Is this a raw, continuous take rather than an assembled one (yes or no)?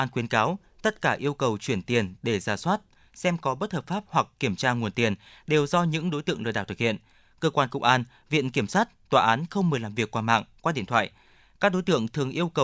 yes